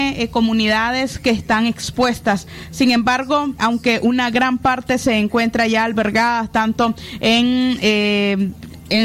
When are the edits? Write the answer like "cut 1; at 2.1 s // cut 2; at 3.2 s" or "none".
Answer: cut 1; at 3.6 s